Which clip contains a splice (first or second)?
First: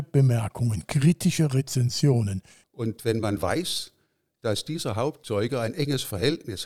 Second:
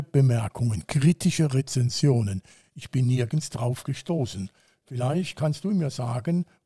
first